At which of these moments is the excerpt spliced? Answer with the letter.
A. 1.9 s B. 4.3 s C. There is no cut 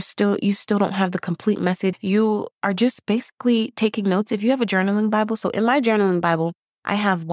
A